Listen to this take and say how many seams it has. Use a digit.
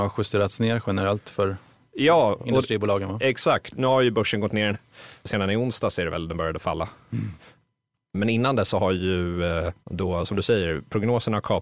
1